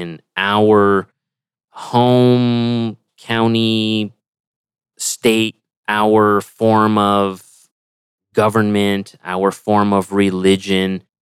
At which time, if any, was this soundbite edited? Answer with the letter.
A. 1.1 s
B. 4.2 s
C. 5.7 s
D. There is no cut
C